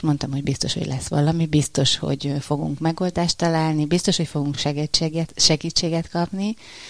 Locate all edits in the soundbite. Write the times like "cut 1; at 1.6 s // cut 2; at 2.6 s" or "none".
none